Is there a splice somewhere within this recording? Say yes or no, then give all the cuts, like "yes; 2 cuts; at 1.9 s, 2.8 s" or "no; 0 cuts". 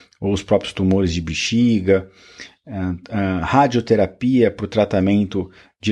no; 0 cuts